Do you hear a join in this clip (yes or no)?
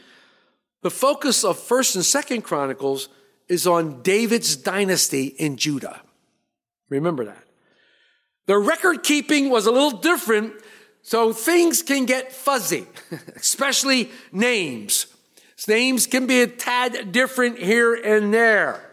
no